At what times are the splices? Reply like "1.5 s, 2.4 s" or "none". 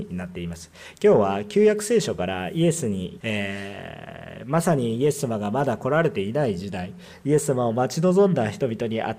3.2 s